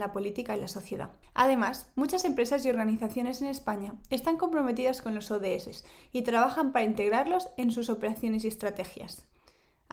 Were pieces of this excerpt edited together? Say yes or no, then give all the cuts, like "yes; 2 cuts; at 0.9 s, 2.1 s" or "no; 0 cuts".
yes; 1 cut; at 1.2 s